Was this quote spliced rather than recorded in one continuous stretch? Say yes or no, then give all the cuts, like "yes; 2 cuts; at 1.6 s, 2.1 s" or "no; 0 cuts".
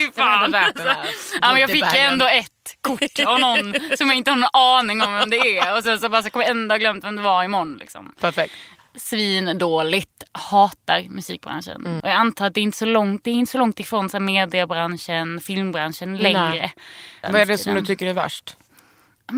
yes; 2 cuts; at 12.0 s, 17.2 s